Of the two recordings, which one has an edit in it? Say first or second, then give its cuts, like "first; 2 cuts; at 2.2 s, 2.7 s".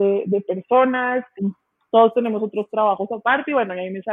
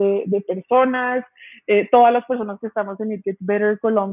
first; 1 cut; at 1.4 s